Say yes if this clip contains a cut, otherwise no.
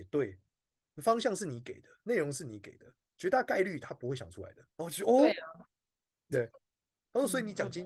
yes